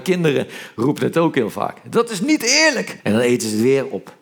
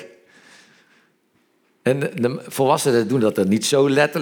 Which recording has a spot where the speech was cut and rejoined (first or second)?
first